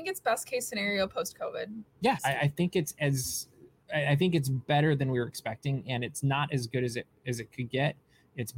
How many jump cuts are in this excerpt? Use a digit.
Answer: 1